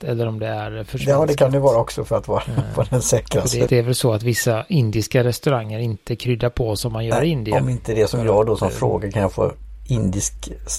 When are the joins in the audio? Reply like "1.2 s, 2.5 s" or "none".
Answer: 3.7 s